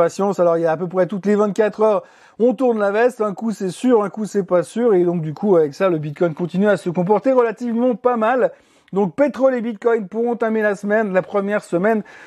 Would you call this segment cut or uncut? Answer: uncut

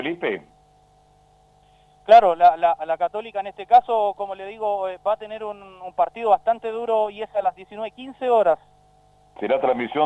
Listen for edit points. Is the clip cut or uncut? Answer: uncut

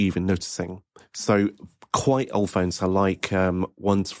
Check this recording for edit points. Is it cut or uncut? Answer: uncut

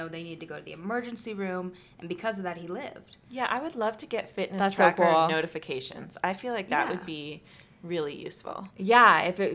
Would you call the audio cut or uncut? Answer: uncut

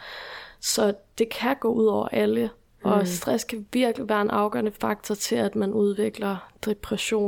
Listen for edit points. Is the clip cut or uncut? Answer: uncut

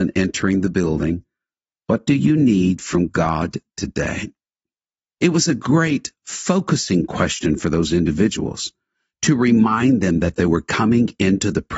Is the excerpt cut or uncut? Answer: uncut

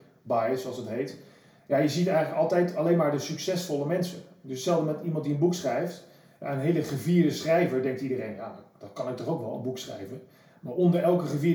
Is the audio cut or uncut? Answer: uncut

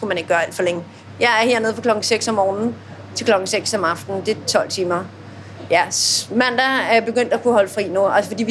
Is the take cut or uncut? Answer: cut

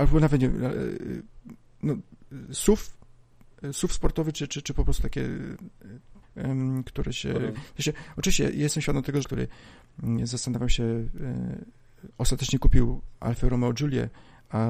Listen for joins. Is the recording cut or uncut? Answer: cut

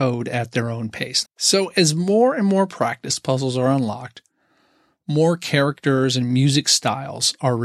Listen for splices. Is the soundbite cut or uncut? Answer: cut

